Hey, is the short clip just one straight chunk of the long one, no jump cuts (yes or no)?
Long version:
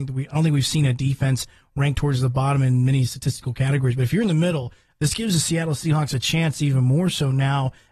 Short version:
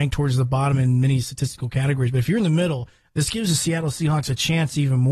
yes